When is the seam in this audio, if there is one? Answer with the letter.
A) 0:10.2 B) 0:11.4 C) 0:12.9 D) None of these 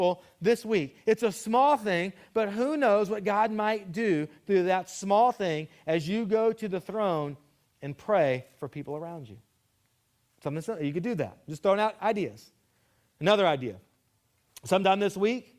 D